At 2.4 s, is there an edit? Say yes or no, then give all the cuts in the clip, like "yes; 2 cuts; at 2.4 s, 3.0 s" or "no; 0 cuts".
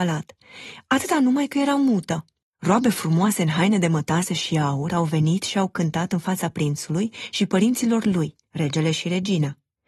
yes; 2 cuts; at 2.4 s, 8.4 s